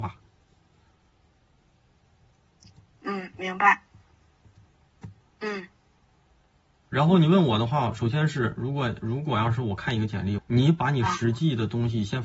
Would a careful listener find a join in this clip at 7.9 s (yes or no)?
no